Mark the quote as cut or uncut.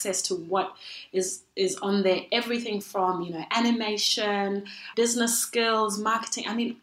cut